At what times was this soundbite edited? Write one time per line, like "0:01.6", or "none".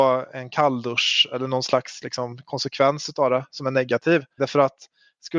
0:04.4